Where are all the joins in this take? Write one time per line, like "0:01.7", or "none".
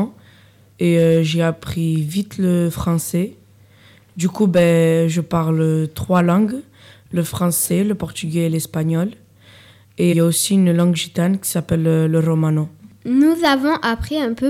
0:10.1